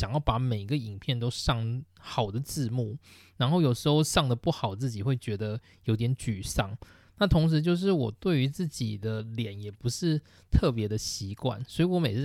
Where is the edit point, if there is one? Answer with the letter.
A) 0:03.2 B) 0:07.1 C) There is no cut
C